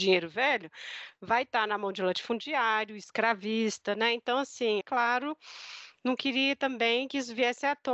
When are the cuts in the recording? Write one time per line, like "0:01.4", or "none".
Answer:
0:04.8